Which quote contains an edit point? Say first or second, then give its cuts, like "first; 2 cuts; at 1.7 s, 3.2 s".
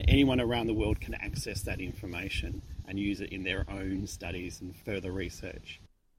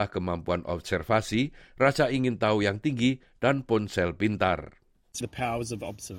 second; 1 cut; at 5.2 s